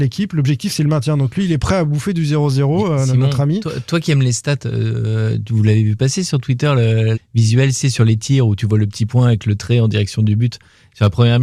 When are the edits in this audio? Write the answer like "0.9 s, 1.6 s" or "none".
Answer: 7.1 s